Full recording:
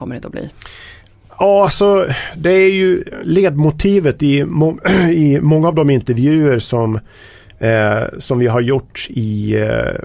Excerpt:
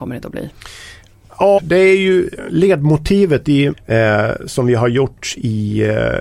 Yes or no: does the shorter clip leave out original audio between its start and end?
yes